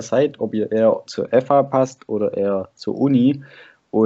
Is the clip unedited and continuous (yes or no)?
yes